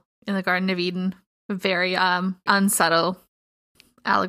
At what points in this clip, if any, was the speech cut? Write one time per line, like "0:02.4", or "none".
0:02.5